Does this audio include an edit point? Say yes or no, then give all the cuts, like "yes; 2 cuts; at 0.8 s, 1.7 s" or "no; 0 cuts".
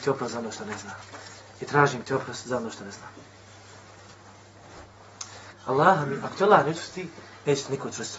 yes; 1 cut; at 5.5 s